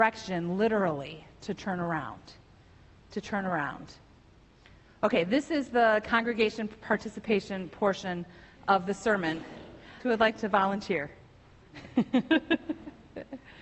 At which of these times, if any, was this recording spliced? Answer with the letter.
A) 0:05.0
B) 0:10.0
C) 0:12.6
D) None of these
B